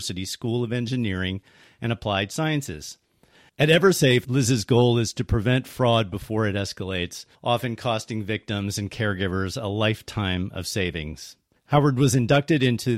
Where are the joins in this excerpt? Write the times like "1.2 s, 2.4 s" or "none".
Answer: 3.5 s, 7.3 s, 11.6 s